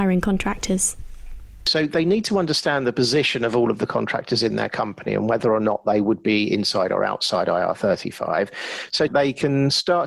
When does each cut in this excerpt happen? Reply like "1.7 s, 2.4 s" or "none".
9.1 s